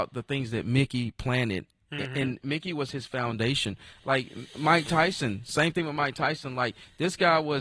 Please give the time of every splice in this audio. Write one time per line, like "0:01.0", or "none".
none